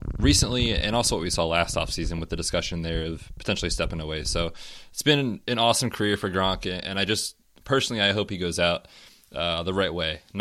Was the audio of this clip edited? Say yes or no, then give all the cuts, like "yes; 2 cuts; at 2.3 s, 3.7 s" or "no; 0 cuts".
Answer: no; 0 cuts